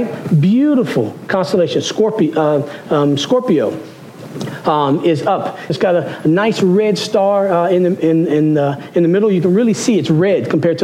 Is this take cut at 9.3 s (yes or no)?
no